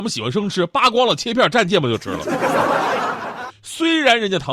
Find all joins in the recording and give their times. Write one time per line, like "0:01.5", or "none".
0:03.5